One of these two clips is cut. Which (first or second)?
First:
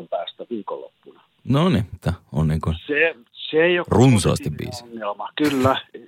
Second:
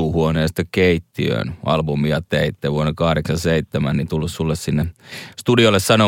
first